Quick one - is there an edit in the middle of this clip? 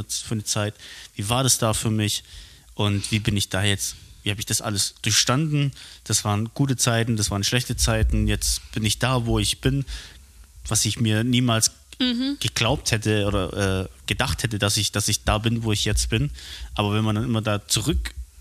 no; 0 cuts

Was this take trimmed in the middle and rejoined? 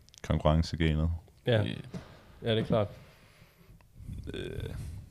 no; 0 cuts

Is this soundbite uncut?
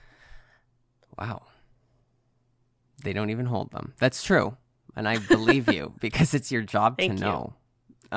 yes; 0 cuts

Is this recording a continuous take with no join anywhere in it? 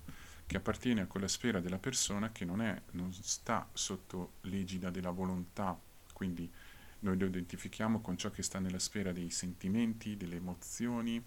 yes; 0 cuts

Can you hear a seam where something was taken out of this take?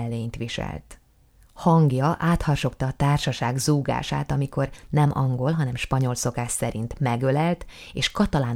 no; 0 cuts

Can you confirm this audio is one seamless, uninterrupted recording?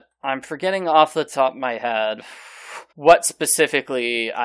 no; 1 cut; at 2.9 s

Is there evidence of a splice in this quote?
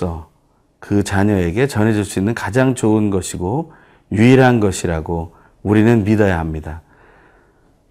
no; 0 cuts

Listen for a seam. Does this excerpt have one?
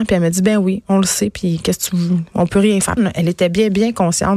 yes; 1 cut; at 3.0 s

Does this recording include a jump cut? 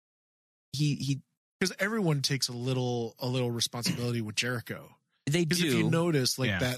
no; 0 cuts

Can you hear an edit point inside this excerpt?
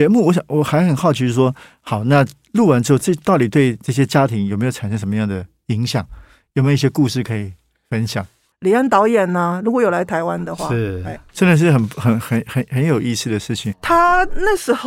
yes; 2 cuts; at 8.5 s, 13.7 s

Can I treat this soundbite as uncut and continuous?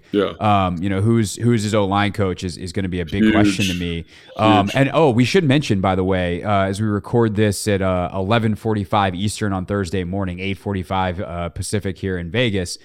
yes; 0 cuts

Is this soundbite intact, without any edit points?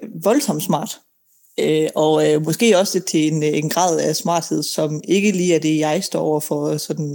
yes; 0 cuts

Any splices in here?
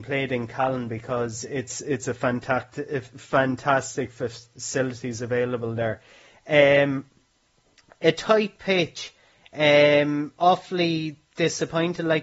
no; 0 cuts

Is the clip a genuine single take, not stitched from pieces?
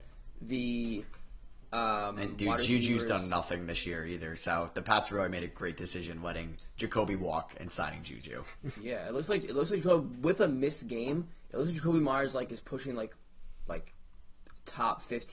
yes; 0 cuts

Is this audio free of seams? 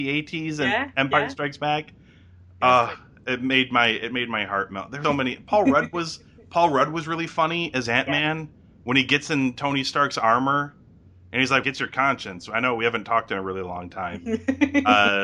no; 2 cuts; at 5.0 s, 11.6 s

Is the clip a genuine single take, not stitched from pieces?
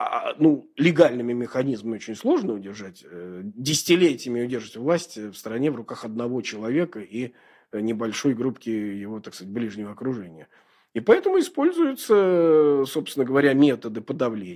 yes; 0 cuts

